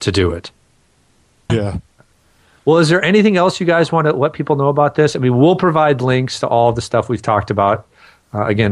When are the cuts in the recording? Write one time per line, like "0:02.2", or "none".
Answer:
0:01.5